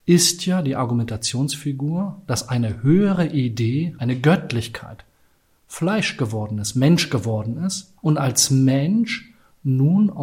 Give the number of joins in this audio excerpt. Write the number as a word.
two